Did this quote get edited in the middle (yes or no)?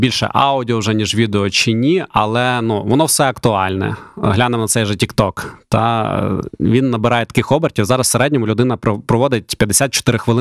no